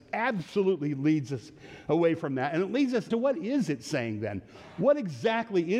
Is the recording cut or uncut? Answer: cut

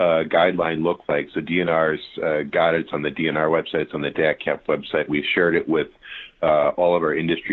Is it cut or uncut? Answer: uncut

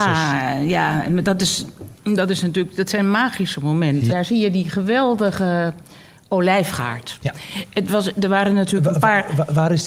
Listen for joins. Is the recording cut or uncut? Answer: cut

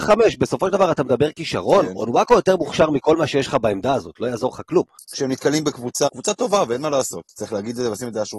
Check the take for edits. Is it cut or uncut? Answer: cut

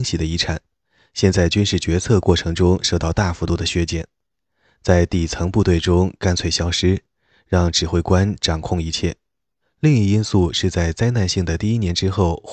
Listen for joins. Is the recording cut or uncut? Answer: cut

